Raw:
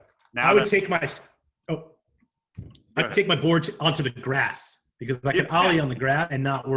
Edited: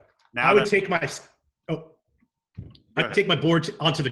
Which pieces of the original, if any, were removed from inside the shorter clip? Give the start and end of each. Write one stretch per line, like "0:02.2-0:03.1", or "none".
none